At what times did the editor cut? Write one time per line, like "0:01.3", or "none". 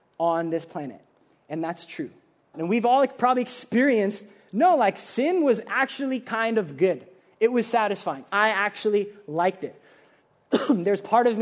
0:02.5